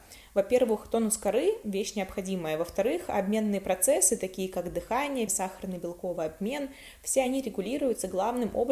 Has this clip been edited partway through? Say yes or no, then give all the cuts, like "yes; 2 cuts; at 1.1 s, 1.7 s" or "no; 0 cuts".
yes; 1 cut; at 5.3 s